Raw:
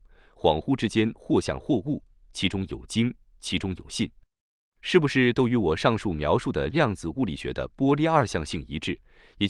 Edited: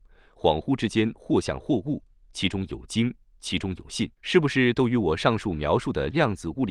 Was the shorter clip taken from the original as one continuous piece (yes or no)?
no